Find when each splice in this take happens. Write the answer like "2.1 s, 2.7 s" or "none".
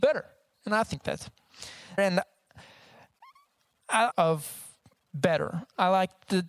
2.0 s, 4.1 s